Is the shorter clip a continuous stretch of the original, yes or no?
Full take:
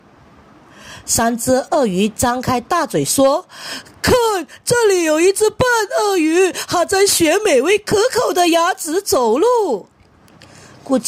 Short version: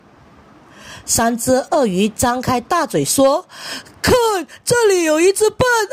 yes